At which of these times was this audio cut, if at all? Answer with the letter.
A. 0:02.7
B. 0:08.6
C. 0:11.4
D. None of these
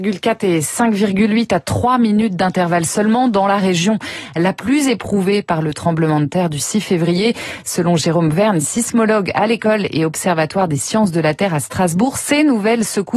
D